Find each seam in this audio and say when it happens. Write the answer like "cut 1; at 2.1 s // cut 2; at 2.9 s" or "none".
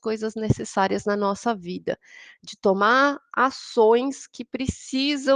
none